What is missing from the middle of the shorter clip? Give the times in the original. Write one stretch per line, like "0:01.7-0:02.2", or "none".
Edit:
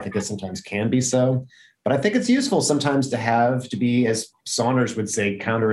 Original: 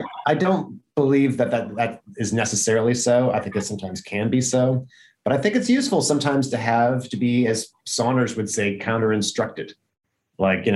none